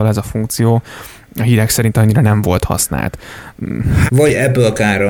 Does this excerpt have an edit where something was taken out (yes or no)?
yes